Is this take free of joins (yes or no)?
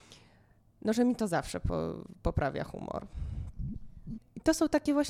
no